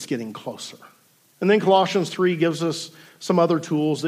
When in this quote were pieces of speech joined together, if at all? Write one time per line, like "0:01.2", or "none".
0:01.3